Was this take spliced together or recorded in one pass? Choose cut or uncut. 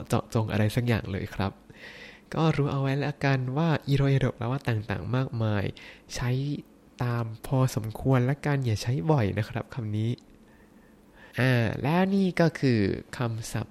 cut